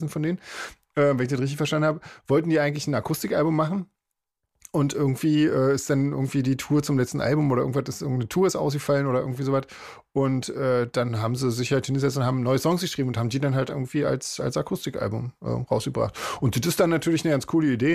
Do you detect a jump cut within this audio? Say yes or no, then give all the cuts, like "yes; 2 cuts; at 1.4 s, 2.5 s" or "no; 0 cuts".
no; 0 cuts